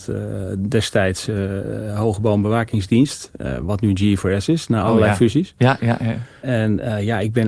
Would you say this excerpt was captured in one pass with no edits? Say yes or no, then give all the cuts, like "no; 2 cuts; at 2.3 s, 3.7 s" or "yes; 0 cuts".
yes; 0 cuts